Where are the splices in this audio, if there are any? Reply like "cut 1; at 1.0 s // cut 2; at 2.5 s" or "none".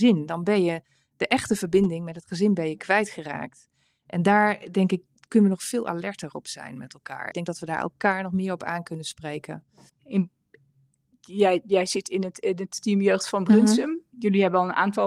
cut 1; at 7.3 s // cut 2; at 10.0 s